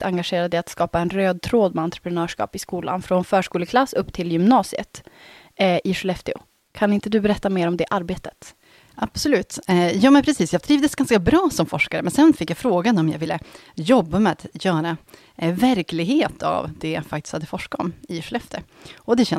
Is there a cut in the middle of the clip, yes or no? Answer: no